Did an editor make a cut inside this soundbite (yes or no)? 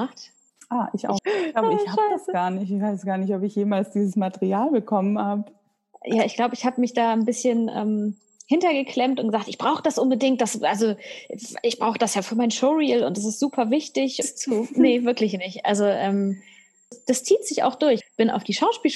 yes